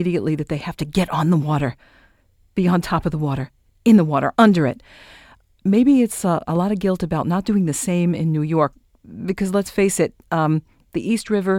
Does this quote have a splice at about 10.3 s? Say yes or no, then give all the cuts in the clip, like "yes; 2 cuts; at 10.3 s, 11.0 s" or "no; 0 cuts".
no; 1 cut; at 4.3 s